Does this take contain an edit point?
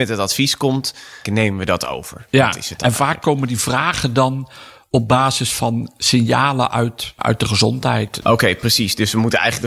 yes; 3 cuts; at 1.3 s, 7.2 s, 8.2 s

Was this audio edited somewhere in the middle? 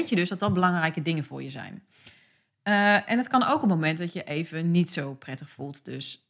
no; 0 cuts

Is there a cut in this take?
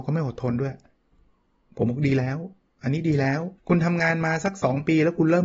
yes; 1 cut; at 3.6 s

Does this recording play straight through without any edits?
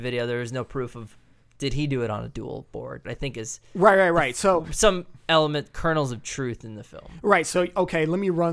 no; 1 cut; at 3.0 s

